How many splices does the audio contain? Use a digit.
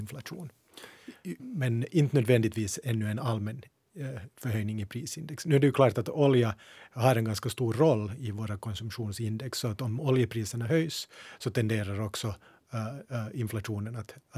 1